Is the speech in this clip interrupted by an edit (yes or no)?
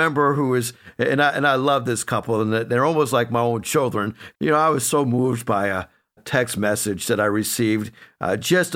yes